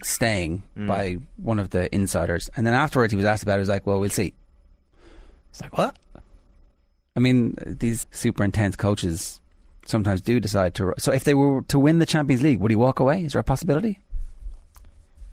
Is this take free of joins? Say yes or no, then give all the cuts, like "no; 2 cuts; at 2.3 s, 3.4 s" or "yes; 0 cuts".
no; 1 cut; at 8.0 s